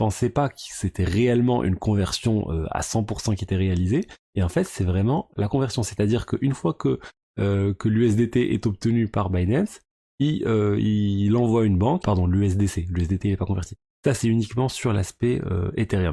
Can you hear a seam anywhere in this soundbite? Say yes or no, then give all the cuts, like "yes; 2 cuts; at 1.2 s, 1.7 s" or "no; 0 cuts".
yes; 2 cuts; at 12.0 s, 13.8 s